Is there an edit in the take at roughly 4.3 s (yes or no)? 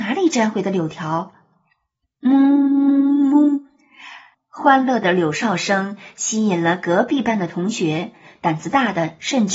yes